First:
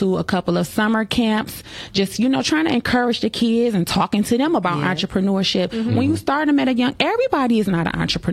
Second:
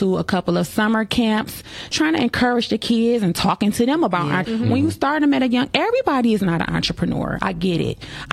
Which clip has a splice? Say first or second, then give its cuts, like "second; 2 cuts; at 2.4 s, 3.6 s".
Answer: second; 2 cuts; at 1.9 s, 4.4 s